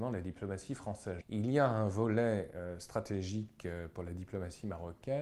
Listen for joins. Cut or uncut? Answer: cut